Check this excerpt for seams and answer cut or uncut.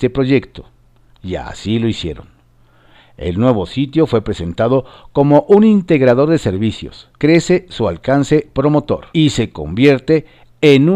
cut